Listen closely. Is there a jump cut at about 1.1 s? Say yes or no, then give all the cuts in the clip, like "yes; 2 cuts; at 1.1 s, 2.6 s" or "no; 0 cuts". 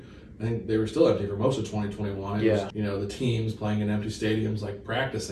no; 1 cut; at 2.7 s